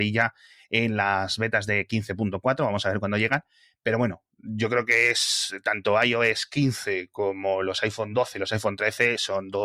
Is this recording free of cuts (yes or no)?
yes